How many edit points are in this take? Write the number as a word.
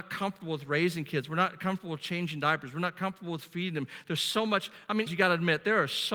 one